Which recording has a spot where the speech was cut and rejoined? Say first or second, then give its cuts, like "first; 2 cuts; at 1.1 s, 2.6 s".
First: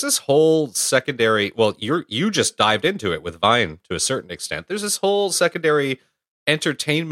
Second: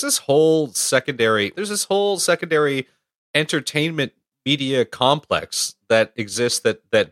second; 1 cut; at 1.5 s